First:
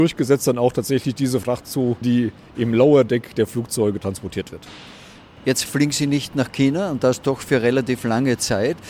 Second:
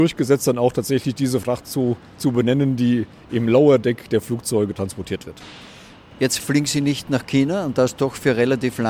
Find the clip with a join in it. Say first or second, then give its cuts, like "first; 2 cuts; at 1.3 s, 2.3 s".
first; 1 cut; at 2.0 s